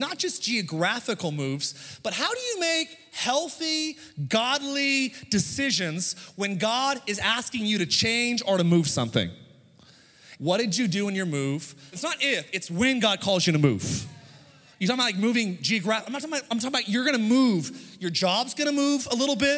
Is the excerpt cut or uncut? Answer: cut